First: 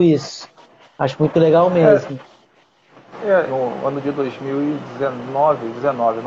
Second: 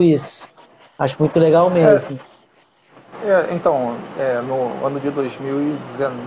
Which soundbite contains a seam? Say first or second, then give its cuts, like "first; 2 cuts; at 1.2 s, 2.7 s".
first; 1 cut; at 3.5 s